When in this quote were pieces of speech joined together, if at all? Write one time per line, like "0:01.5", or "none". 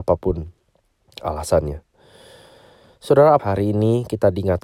0:03.4